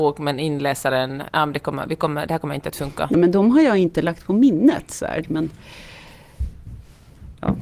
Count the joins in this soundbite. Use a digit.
2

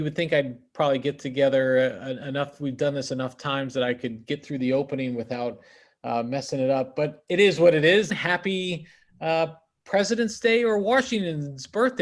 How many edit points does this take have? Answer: 1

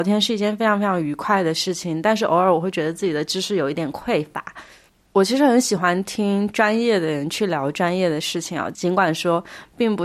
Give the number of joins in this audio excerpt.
0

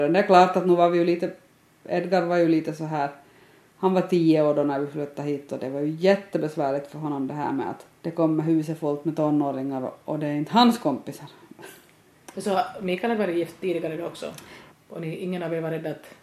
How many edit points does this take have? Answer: 2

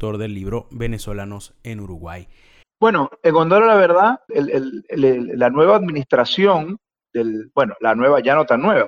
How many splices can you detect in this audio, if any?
2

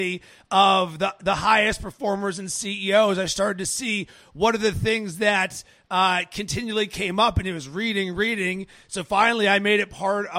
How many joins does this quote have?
1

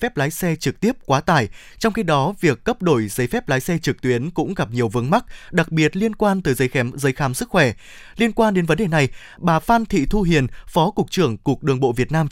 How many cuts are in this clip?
0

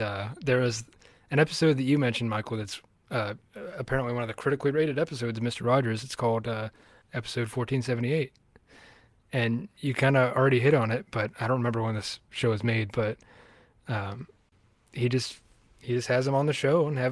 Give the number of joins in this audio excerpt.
1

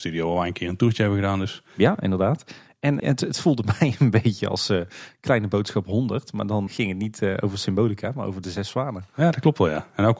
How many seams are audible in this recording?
2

